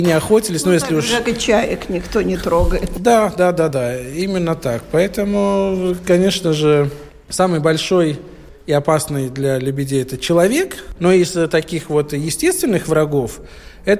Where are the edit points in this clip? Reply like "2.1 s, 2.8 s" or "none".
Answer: 3.7 s, 11.0 s